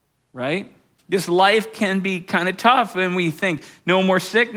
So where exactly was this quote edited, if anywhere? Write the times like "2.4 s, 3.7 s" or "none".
1.0 s